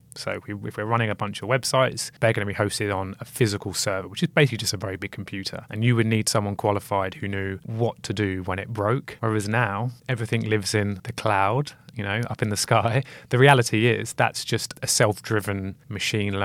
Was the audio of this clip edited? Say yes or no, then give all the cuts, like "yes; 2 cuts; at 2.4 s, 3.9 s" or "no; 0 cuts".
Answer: no; 0 cuts